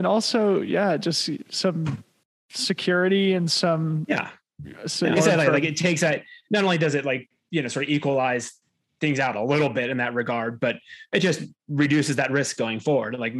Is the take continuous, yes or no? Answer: no